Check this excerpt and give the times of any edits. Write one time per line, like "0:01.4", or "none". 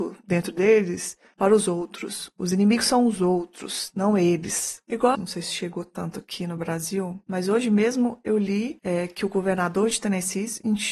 0:05.1